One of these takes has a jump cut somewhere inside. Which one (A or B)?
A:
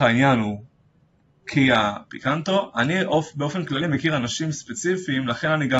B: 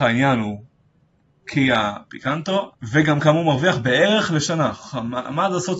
B